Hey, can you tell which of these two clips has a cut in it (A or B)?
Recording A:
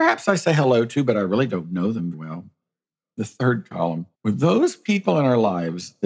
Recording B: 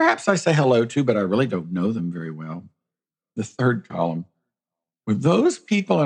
A